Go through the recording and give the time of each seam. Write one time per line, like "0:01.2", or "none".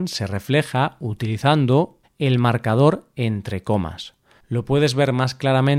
0:02.0